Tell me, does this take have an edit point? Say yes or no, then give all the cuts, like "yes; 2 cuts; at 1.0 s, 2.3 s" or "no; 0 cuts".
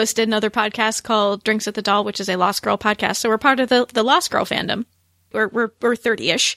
yes; 1 cut; at 5.3 s